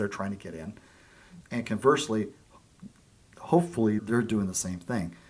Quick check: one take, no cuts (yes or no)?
no